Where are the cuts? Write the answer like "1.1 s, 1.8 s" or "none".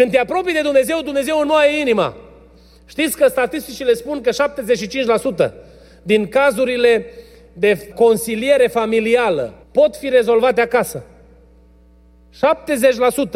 7.9 s, 9.6 s